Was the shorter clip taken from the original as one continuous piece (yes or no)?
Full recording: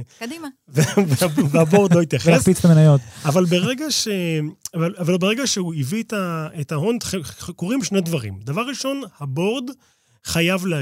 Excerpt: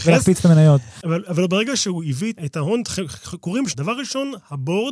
no